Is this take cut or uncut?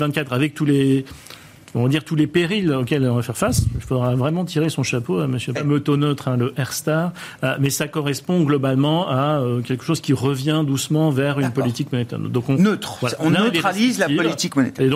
cut